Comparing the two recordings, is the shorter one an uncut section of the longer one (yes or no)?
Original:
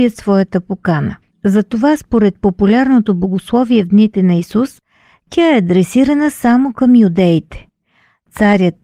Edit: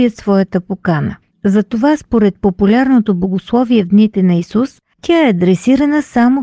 no